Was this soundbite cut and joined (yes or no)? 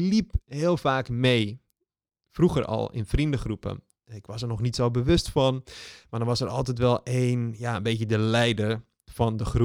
no